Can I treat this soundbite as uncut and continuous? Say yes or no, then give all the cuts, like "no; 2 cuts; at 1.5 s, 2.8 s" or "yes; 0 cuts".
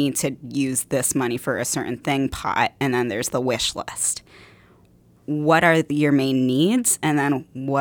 yes; 0 cuts